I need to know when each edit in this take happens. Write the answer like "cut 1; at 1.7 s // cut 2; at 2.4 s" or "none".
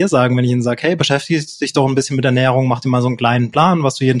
none